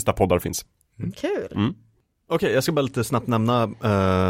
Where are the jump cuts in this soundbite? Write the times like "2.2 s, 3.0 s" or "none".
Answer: none

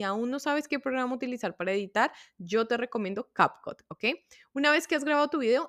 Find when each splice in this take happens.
none

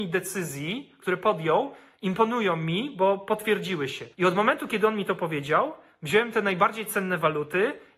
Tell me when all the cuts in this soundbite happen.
4.1 s

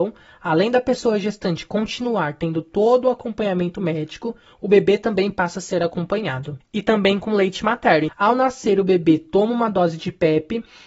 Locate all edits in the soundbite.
6.6 s, 8.1 s

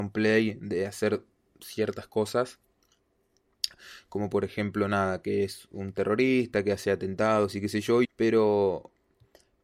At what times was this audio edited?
8.0 s

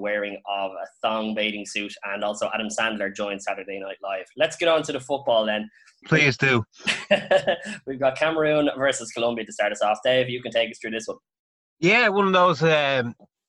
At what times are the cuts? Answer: none

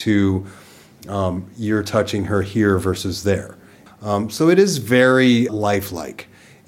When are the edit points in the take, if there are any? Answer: 3.9 s, 5.5 s

